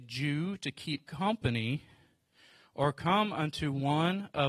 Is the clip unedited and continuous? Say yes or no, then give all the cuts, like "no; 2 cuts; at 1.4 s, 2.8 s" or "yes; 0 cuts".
yes; 0 cuts